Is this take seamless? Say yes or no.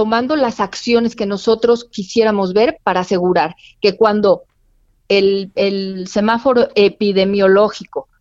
yes